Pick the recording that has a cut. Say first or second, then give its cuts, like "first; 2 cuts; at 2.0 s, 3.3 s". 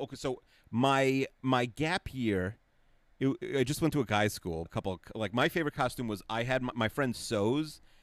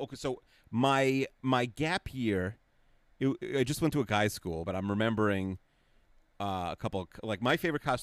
first; 1 cut; at 4.7 s